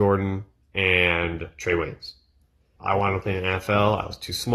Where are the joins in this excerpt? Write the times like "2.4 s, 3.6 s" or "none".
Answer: 2.8 s